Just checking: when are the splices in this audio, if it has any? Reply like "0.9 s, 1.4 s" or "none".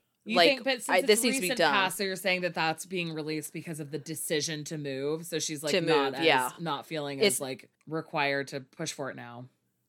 none